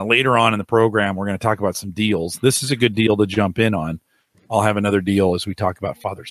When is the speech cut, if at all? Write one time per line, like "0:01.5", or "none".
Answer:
none